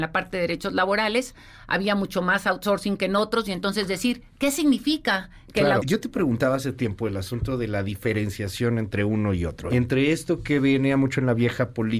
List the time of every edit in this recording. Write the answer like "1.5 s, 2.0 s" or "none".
5.8 s, 9.7 s